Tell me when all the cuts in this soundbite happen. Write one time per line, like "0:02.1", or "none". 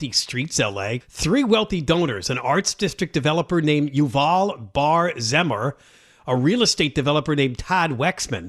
0:01.0